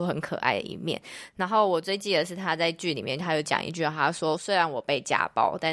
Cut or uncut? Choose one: uncut